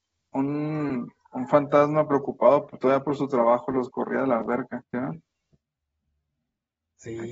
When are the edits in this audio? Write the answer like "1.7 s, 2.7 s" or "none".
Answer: 4.8 s